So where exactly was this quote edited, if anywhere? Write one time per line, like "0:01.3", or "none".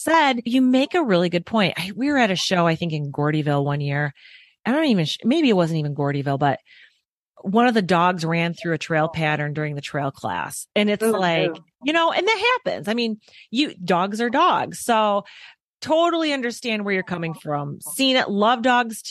none